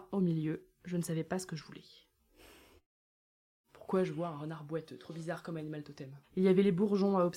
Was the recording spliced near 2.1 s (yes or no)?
no